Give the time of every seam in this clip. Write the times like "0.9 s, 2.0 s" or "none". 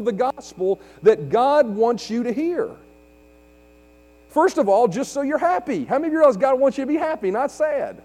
none